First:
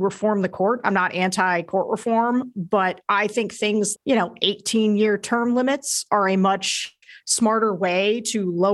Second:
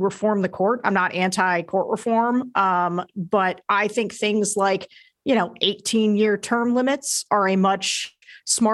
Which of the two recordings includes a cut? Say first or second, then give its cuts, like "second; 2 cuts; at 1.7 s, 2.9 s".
first; 2 cuts; at 2.5 s, 3.9 s